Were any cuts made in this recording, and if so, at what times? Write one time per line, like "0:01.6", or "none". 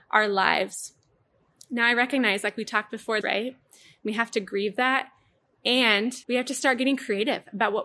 0:03.2
0:06.2